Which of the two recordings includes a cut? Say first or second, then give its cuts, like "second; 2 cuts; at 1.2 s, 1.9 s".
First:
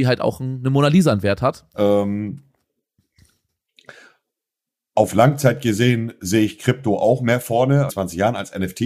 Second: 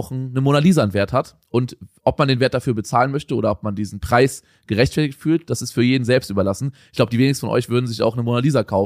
first; 2 cuts; at 1.7 s, 7.9 s